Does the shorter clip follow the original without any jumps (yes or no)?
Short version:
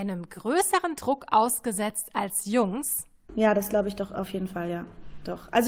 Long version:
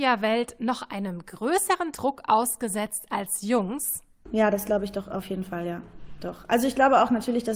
yes